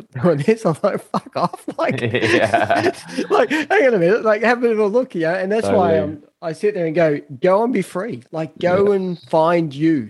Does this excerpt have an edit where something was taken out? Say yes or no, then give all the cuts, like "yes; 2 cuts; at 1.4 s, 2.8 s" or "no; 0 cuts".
no; 0 cuts